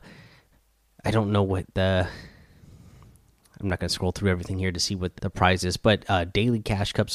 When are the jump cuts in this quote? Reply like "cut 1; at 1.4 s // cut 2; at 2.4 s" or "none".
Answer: cut 1; at 5.2 s